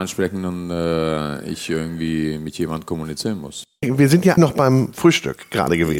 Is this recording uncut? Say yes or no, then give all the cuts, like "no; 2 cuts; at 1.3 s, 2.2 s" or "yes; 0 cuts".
no; 1 cut; at 4.4 s